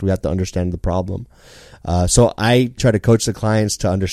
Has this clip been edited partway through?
yes; 1 cut; at 2.8 s

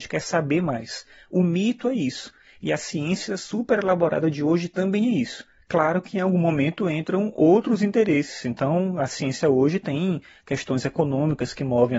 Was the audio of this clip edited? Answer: no; 0 cuts

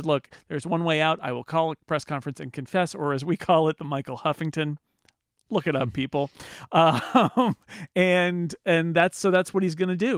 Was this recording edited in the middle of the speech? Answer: no; 0 cuts

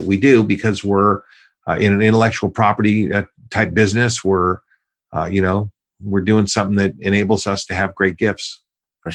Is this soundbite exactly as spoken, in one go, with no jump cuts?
yes; 0 cuts

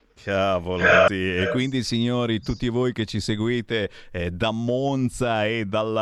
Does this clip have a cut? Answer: yes; 1 cut; at 1.1 s

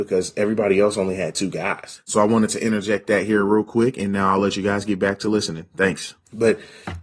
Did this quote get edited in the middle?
yes; 1 cut; at 2.0 s

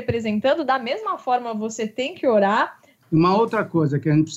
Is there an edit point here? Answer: yes; 1 cut; at 3.0 s

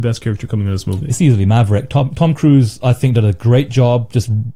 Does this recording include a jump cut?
no; 0 cuts

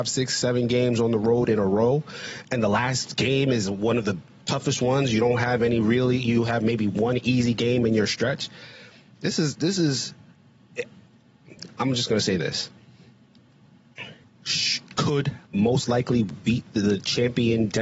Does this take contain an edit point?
yes; 2 cuts; at 14.2 s, 15.5 s

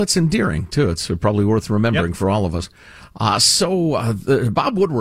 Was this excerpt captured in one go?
yes; 0 cuts

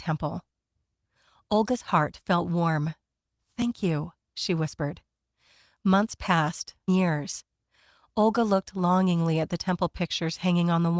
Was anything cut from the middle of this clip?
yes; 1 cut; at 6.9 s

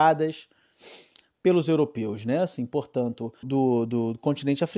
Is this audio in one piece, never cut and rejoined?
no; 1 cut; at 3.4 s

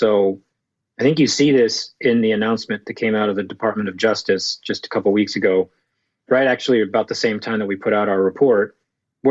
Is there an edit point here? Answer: yes; 1 cut; at 6.3 s

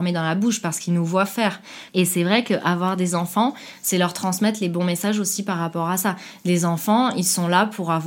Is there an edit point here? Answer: yes; 1 cut; at 1.9 s

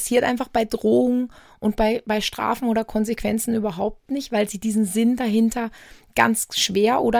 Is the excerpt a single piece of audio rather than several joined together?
yes; 0 cuts

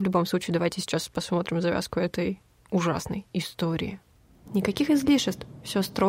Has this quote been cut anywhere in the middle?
yes; 1 cut; at 4.5 s

